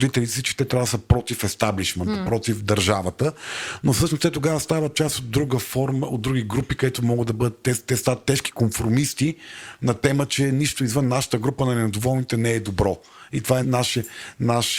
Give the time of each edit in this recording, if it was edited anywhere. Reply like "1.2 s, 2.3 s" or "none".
13.6 s